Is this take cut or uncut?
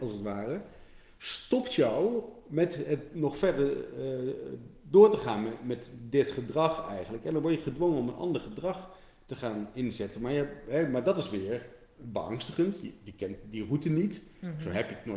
uncut